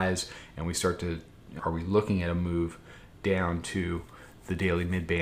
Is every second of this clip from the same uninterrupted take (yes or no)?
no